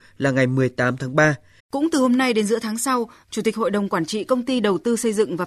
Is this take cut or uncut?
cut